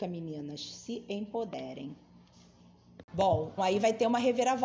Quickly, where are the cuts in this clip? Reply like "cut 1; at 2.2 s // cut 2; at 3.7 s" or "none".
cut 1; at 3.6 s